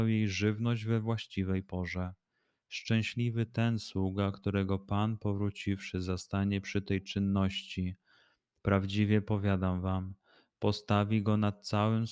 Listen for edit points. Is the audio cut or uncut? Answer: uncut